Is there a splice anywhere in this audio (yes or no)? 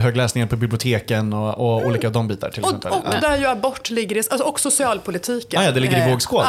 no